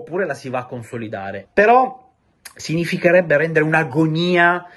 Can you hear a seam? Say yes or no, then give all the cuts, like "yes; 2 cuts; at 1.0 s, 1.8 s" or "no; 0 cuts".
yes; 1 cut; at 1.4 s